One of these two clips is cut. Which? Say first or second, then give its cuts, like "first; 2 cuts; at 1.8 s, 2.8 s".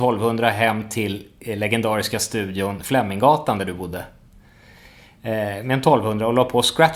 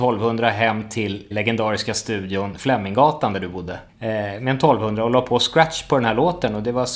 second; 2 cuts; at 1.3 s, 3.9 s